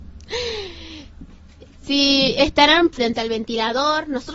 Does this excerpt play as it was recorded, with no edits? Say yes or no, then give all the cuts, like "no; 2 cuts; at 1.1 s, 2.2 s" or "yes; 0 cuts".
no; 1 cut; at 2.9 s